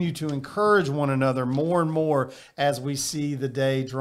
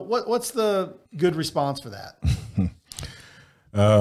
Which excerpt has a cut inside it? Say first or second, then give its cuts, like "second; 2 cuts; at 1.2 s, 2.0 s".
second; 1 cut; at 1.1 s